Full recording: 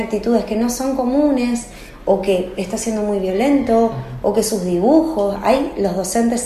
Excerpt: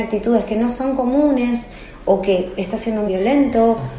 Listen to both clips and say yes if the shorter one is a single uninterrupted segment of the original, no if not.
no